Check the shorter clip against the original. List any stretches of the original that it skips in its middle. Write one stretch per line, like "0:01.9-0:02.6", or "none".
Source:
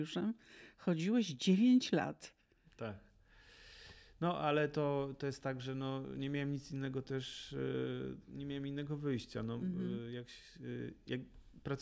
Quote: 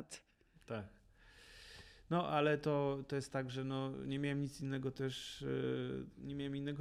none

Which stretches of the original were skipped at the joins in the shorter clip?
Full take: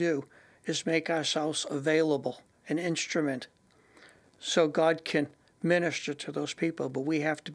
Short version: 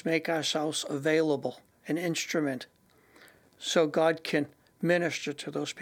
none

